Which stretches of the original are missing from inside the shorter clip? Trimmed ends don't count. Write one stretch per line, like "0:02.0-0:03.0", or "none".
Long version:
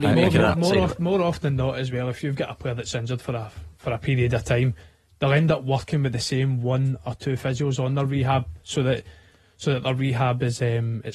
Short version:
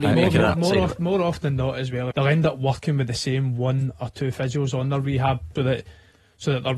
0:02.1-0:05.2
0:08.6-0:08.8